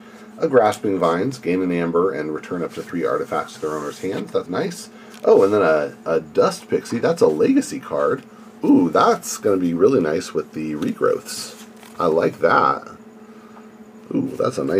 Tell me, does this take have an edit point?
yes; 1 cut; at 4.5 s

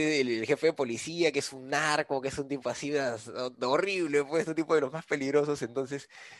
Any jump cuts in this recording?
no; 0 cuts

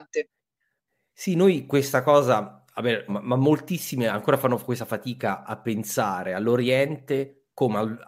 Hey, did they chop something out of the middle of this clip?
yes; 1 cut; at 3.1 s

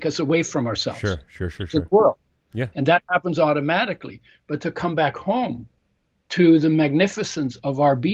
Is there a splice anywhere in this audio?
no; 0 cuts

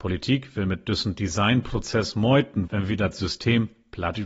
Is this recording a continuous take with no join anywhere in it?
no; 1 cut; at 2.7 s

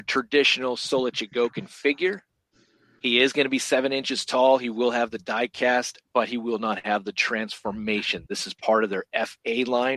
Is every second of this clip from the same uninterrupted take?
yes; 0 cuts

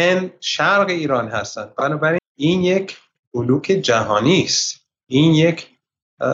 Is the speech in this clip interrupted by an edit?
yes; 1 cut; at 2.2 s

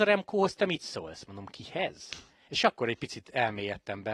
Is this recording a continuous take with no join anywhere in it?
yes; 0 cuts

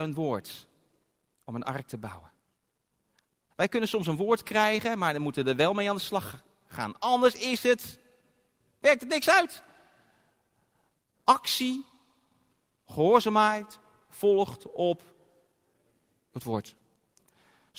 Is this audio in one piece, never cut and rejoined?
no; 1 cut; at 3.5 s

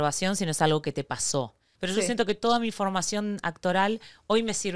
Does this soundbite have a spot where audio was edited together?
yes; 1 cut; at 1.7 s

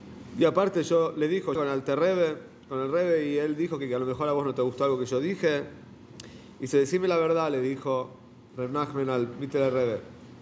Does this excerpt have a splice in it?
yes; 1 cut; at 1.6 s

